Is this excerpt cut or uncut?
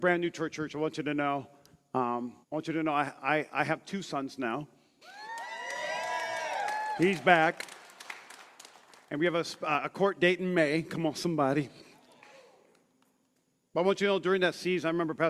cut